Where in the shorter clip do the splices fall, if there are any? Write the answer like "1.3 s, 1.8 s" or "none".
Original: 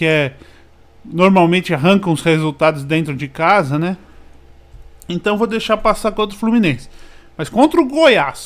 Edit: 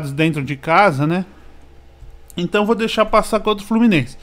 none